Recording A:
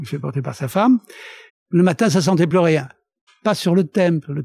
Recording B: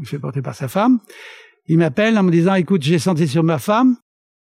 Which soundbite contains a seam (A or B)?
A